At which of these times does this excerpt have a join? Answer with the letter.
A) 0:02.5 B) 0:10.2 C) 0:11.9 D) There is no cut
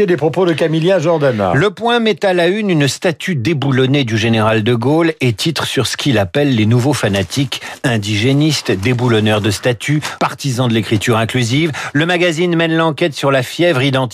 B